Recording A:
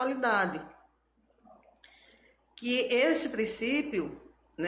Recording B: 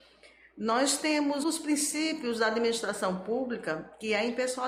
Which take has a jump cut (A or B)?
B